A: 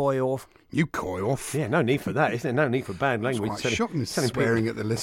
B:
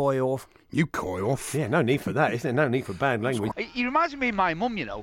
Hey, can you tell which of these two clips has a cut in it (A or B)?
B